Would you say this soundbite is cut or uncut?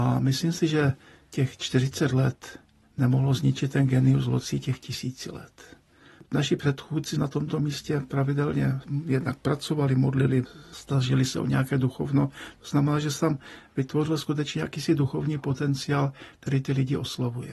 uncut